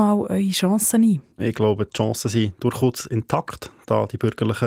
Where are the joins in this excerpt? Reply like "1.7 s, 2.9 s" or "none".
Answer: 1.3 s